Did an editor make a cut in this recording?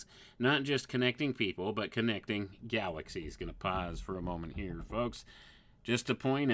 no; 0 cuts

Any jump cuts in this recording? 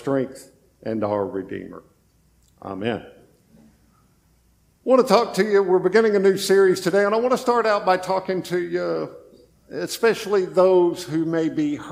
no; 0 cuts

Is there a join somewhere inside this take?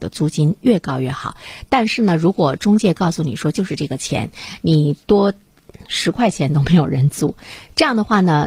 no; 0 cuts

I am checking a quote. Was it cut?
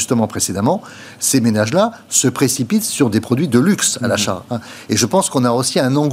no; 0 cuts

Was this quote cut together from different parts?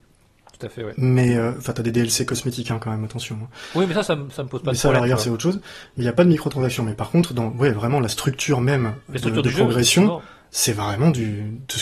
no; 0 cuts

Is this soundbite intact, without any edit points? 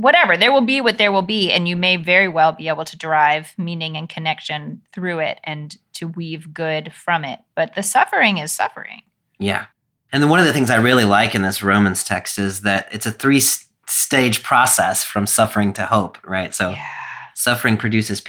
yes; 0 cuts

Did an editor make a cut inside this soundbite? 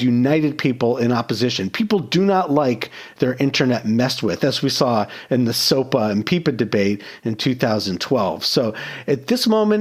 no; 0 cuts

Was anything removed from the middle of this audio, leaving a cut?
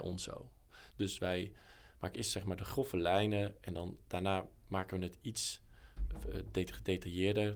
yes; 1 cut; at 0.9 s

